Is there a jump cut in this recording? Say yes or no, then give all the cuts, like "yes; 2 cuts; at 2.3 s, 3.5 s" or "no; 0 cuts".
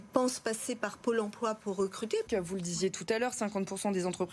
yes; 1 cut; at 2.3 s